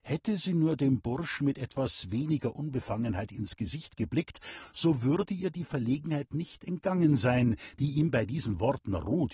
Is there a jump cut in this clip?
no; 0 cuts

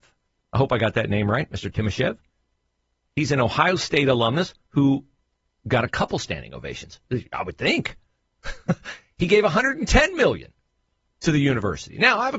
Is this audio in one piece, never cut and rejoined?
yes; 0 cuts

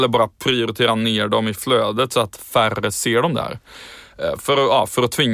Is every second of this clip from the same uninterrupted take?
yes; 0 cuts

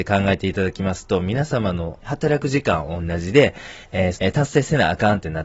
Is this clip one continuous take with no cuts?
no; 2 cuts; at 2.0 s, 4.1 s

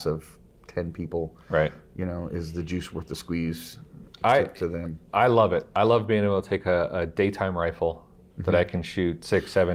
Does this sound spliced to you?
no; 0 cuts

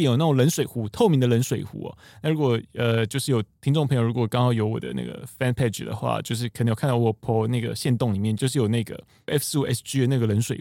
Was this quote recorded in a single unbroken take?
yes; 0 cuts

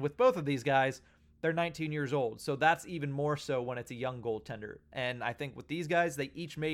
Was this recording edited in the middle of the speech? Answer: no; 0 cuts

